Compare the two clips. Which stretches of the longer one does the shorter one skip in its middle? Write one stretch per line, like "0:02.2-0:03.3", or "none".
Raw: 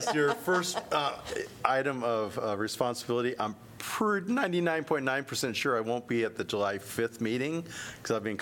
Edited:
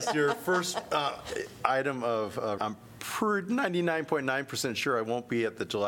0:02.6-0:03.4